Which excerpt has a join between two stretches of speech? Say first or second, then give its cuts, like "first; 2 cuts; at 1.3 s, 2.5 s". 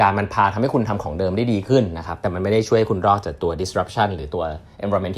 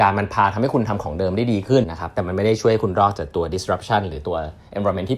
second; 1 cut; at 1.8 s